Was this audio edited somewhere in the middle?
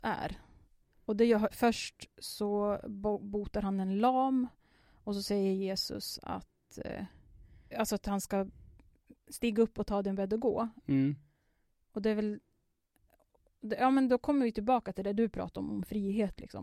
yes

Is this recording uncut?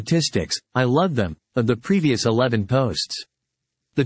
yes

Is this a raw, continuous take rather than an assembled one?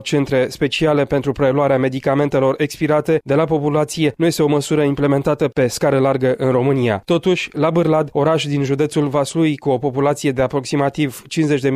yes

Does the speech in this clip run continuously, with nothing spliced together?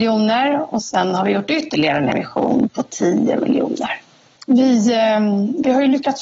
no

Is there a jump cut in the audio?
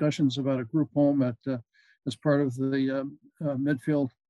no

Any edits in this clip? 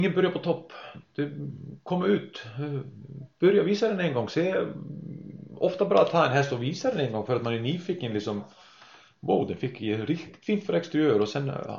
no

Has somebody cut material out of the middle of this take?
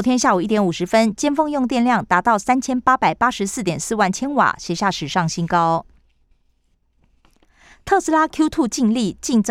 no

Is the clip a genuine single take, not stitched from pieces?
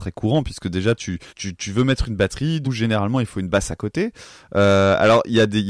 no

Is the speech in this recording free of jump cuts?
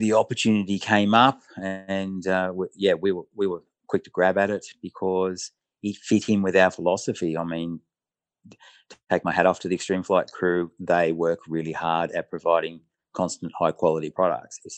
yes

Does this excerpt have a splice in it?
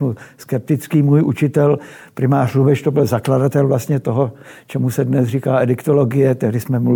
no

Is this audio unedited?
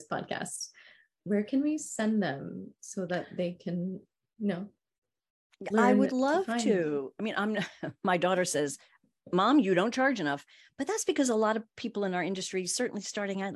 yes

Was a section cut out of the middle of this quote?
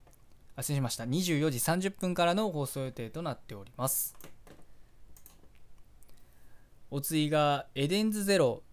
no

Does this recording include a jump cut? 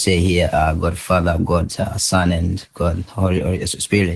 no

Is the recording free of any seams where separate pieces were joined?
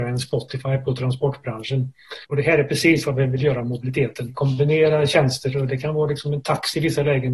no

